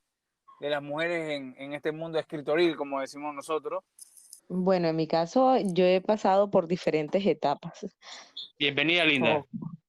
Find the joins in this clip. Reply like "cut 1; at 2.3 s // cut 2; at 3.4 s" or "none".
cut 1; at 4.4 s // cut 2; at 8.5 s